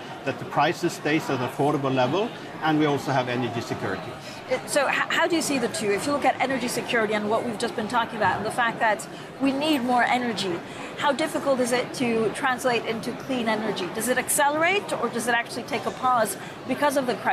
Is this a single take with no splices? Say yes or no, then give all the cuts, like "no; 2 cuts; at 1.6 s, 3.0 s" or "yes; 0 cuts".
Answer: yes; 0 cuts